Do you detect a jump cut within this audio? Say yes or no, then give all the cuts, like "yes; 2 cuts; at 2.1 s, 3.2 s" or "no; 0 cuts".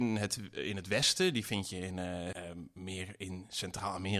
yes; 1 cut; at 2.3 s